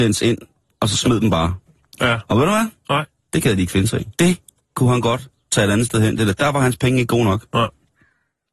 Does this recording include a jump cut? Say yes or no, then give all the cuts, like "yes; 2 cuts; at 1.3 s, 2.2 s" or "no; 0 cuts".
yes; 1 cut; at 4.2 s